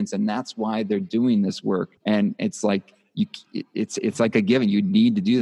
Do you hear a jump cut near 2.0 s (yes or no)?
yes